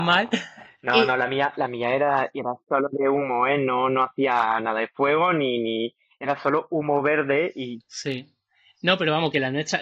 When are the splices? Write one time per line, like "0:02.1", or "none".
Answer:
none